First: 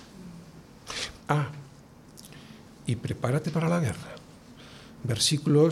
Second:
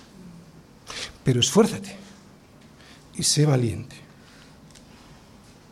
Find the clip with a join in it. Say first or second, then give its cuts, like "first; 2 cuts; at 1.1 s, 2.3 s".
first; 1 cut; at 1.2 s